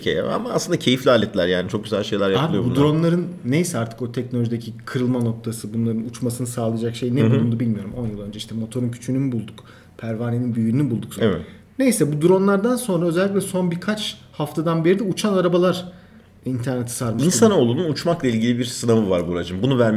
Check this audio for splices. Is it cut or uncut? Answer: cut